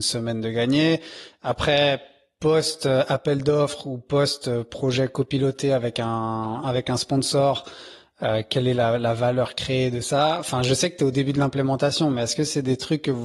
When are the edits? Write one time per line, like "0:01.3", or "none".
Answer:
none